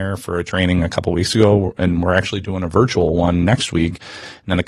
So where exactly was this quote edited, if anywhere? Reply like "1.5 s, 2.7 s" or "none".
none